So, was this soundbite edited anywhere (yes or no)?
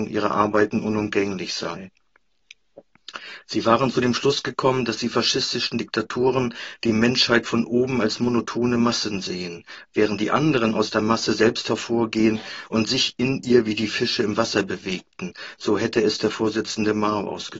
yes